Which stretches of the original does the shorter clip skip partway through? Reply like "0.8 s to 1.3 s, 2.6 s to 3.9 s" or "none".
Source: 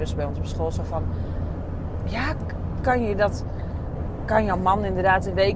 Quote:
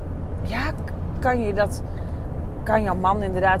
none